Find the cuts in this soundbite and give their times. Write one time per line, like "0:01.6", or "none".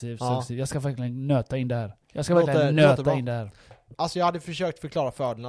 0:02.0
0:03.9